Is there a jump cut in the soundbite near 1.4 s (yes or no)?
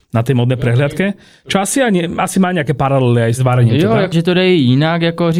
no